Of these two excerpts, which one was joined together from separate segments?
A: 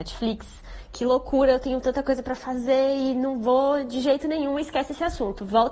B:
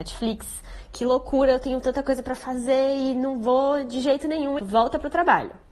B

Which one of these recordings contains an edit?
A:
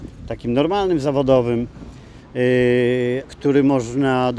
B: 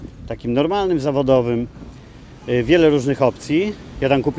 A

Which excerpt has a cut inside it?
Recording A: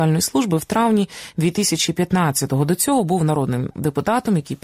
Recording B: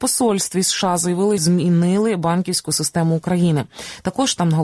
B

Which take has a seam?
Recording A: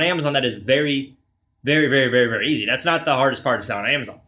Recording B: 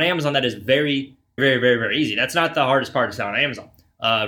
B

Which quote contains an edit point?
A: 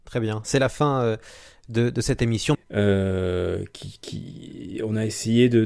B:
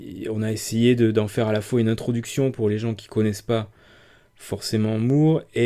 A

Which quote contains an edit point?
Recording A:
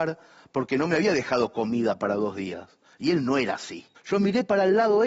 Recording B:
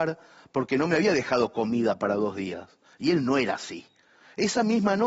A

